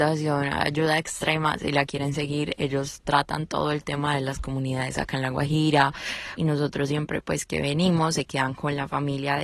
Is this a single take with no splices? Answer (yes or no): no